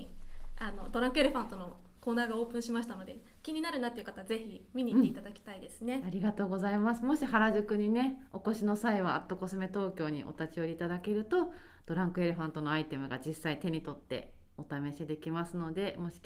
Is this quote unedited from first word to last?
yes; 0 cuts

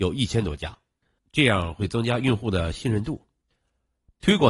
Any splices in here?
yes; 1 cut; at 1.2 s

